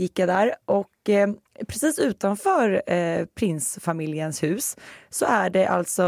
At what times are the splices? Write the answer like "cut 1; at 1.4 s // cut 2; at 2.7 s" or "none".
none